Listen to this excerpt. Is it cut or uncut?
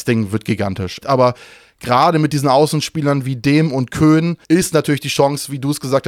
cut